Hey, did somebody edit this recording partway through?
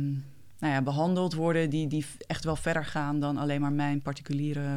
no; 0 cuts

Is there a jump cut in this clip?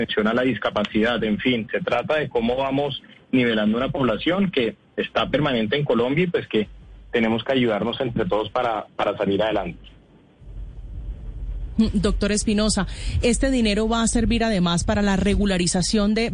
no; 0 cuts

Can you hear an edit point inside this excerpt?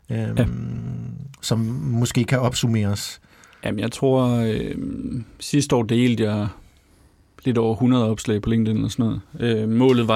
no; 0 cuts

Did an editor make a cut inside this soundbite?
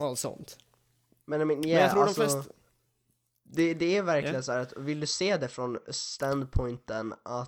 no; 0 cuts

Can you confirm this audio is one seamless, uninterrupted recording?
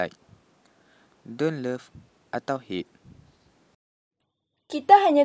no; 1 cut; at 1.1 s

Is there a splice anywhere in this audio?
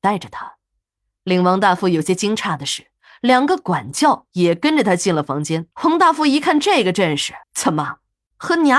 yes; 2 cuts; at 5.7 s, 7.4 s

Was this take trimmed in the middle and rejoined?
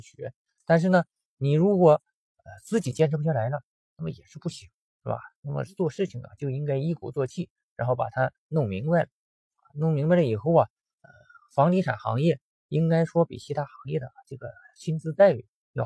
no; 0 cuts

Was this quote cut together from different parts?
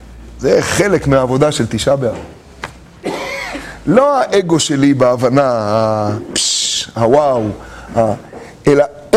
no; 0 cuts

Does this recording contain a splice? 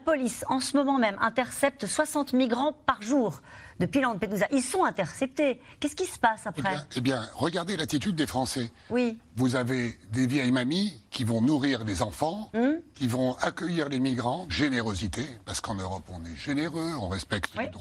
yes; 1 cut; at 14.5 s

